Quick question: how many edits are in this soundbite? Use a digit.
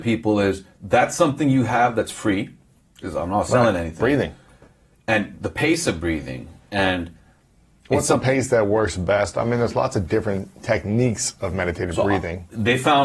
0